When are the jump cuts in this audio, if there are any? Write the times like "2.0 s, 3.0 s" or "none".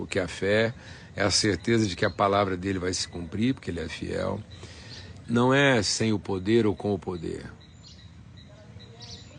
5.2 s